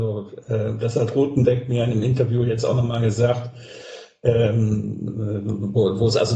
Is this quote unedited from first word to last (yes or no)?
yes